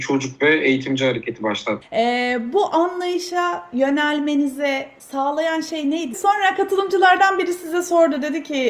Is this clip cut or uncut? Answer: cut